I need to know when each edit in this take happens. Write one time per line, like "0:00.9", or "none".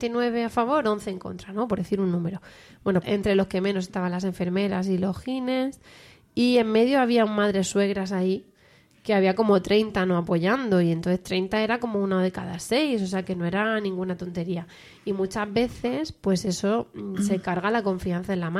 0:03.0